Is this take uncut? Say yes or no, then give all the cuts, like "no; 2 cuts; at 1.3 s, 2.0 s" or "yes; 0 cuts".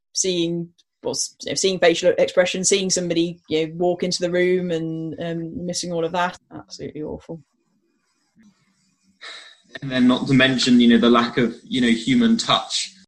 no; 1 cut; at 6.4 s